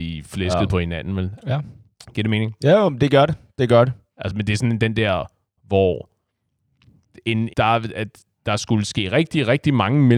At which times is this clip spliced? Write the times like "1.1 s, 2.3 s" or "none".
1.4 s, 4.2 s, 7.5 s